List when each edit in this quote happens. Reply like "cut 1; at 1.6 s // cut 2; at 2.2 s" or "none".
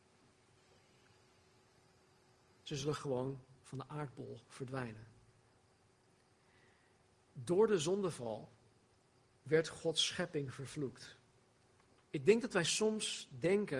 cut 1; at 12.0 s